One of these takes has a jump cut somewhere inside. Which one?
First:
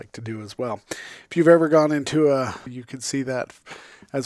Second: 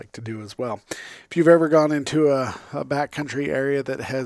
first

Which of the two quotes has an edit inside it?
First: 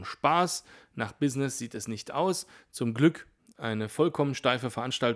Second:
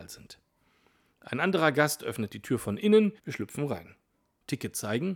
second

